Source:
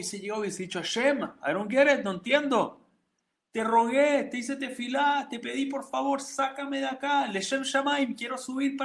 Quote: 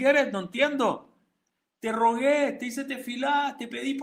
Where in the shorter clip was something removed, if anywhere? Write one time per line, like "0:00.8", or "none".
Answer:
none